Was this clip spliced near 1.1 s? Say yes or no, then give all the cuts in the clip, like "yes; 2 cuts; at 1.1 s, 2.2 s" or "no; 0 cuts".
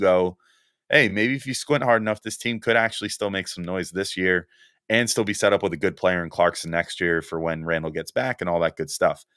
no; 0 cuts